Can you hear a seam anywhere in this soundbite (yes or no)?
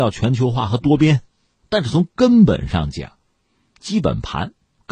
yes